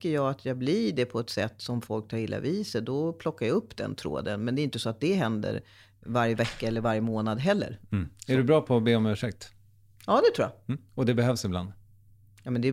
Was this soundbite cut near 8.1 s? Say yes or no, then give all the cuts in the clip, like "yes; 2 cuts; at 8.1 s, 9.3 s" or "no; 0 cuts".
no; 1 cut; at 10.9 s